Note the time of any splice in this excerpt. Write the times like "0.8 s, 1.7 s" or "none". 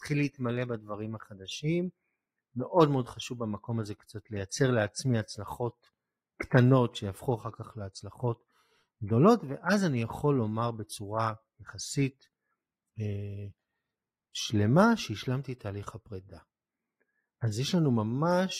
none